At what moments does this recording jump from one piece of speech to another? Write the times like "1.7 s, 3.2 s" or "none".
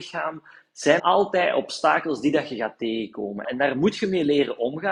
1.0 s, 3.4 s